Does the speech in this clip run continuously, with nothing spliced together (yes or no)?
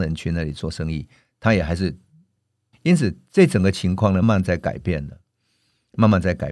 no